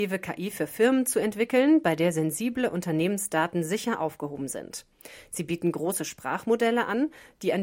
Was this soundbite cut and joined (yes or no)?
no